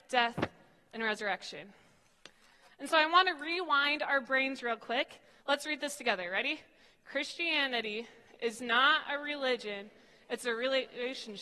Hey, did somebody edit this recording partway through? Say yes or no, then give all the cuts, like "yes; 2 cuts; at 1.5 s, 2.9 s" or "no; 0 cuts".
yes; 1 cut; at 5.4 s